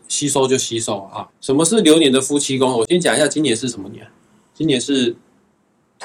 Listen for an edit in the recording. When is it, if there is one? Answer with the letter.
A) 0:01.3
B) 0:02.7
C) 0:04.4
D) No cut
A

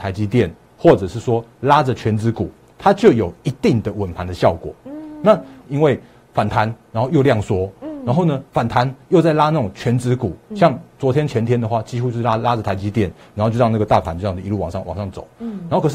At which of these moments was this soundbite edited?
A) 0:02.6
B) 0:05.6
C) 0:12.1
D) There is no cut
B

